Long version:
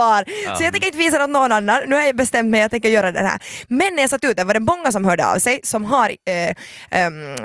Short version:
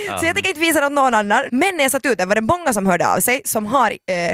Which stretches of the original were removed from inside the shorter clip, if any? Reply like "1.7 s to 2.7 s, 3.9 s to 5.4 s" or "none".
1.9 s to 3.7 s